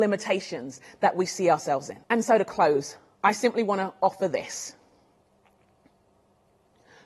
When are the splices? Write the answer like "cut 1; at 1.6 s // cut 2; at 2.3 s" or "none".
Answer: cut 1; at 2.0 s